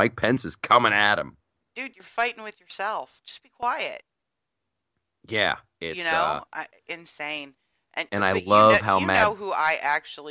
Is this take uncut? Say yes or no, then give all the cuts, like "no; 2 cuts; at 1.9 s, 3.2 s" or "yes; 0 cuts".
yes; 0 cuts